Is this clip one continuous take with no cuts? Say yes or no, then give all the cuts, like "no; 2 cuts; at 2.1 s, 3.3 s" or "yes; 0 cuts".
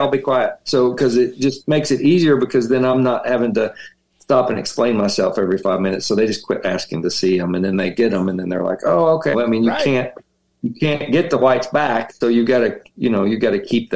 no; 2 cuts; at 9.3 s, 12.2 s